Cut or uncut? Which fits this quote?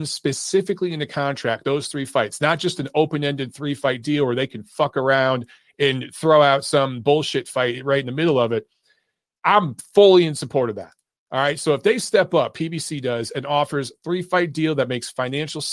uncut